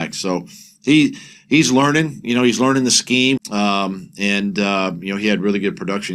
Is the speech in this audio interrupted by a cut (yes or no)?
yes